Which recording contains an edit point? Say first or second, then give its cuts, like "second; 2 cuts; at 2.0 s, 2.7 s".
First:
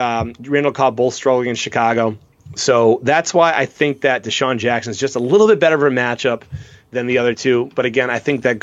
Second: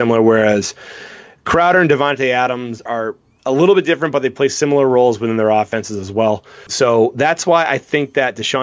second; 2 cuts; at 2.9 s, 6.7 s